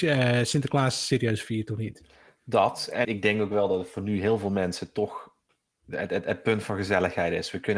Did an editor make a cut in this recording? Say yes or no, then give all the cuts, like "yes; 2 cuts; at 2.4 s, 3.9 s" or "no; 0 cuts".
yes; 1 cut; at 3.0 s